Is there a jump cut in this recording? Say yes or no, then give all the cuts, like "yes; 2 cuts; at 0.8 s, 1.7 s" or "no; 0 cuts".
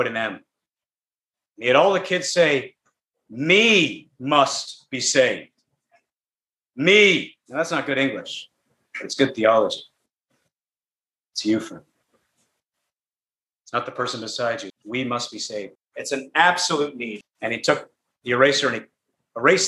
yes; 3 cuts; at 14.7 s, 15.8 s, 17.2 s